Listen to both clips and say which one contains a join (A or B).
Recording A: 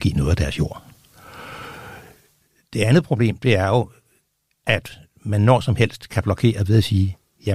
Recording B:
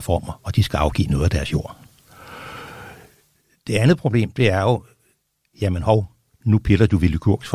B